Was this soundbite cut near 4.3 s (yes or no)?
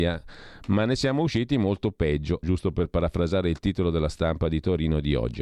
no